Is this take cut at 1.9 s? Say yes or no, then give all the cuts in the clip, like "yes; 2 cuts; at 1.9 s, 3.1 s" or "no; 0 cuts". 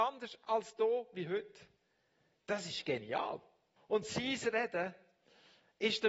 no; 1 cut; at 3.8 s